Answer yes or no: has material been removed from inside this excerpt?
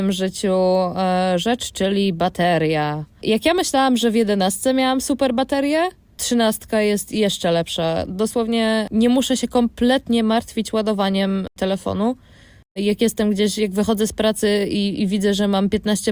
no